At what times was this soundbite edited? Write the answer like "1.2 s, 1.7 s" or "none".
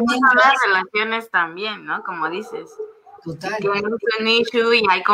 none